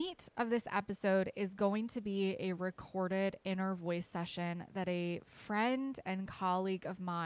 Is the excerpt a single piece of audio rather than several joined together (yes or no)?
yes